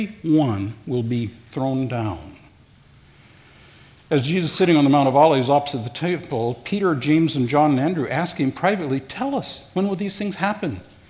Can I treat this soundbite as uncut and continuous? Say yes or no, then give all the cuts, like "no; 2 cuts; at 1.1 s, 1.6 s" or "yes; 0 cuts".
yes; 0 cuts